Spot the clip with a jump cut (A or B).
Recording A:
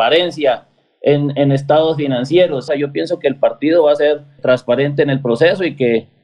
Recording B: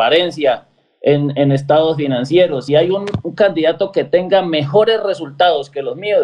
A